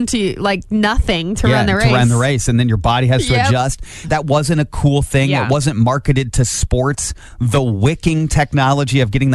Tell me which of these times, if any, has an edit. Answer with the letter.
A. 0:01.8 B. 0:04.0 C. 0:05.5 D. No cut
B